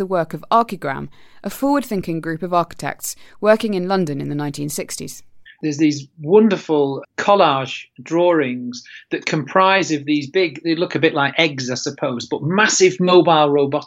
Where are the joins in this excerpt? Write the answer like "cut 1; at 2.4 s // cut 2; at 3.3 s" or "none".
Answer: cut 1; at 5.5 s // cut 2; at 7.0 s